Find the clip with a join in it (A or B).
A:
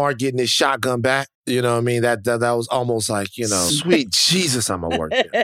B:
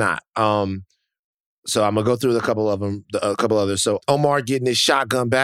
A